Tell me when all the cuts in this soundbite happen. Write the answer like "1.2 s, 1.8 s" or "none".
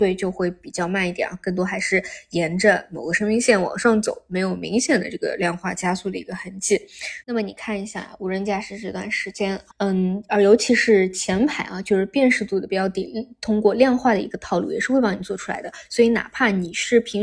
7.2 s, 9.7 s